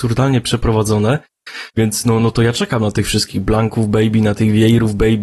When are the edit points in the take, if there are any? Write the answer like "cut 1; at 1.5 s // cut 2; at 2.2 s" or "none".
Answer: cut 1; at 1.7 s